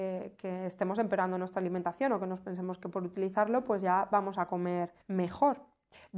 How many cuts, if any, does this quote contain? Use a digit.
1